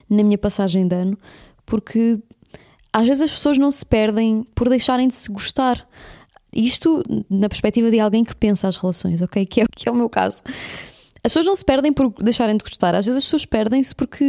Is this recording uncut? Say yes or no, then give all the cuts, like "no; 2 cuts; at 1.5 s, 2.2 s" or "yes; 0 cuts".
no; 1 cut; at 9.7 s